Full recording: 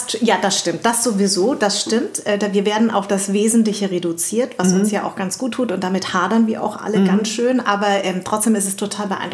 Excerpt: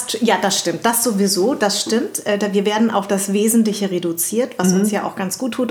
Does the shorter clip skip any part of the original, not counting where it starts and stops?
no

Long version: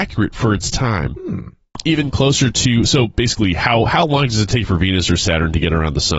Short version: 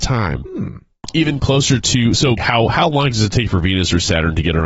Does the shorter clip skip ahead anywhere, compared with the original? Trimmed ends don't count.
yes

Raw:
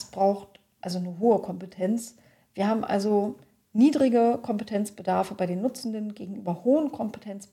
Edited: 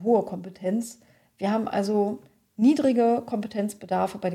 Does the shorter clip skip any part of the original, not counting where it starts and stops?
no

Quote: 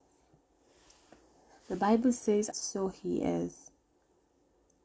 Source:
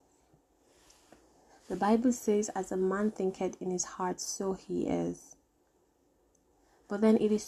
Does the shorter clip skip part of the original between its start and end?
yes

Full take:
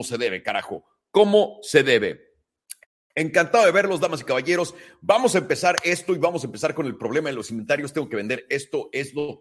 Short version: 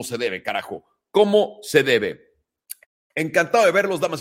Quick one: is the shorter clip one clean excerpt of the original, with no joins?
yes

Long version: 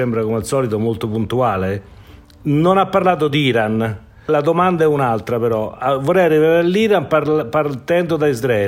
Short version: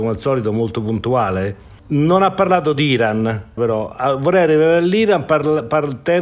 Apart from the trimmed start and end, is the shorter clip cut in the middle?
yes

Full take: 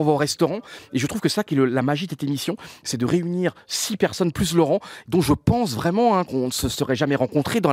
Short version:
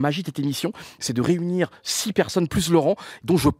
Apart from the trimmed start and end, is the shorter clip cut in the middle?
no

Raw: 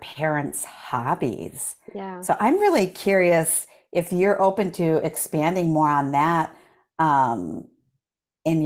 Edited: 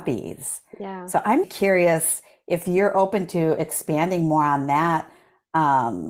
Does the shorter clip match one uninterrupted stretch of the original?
no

